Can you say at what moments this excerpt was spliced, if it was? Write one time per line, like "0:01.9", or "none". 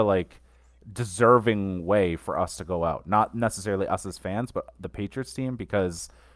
none

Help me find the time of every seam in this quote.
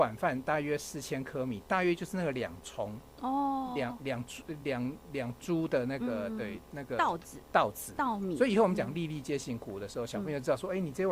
none

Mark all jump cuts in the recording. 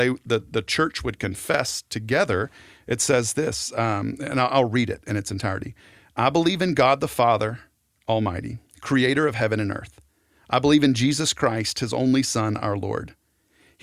none

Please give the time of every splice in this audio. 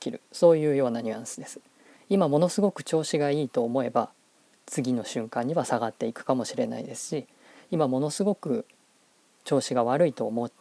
0:02.0

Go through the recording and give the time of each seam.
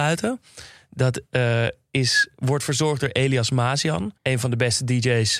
0:04.2

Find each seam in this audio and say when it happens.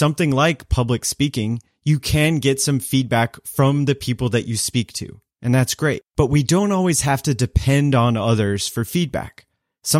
none

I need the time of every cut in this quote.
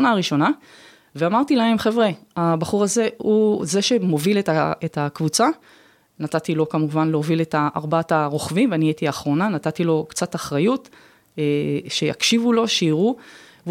none

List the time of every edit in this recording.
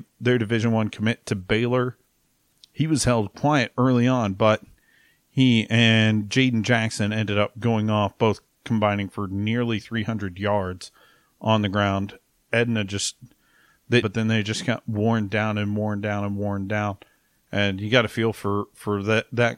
0:14.0

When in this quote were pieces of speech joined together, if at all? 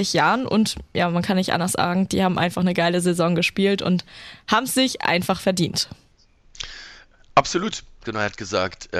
0:08.0

